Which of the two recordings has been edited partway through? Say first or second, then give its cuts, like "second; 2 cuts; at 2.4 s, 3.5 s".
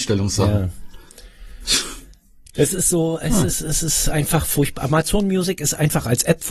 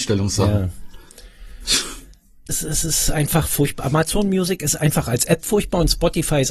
second; 1 cut; at 2.5 s